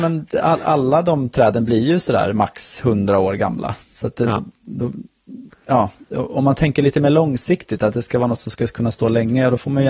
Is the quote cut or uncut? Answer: uncut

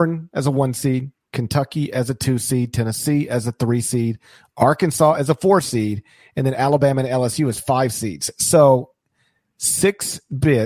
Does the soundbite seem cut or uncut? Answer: uncut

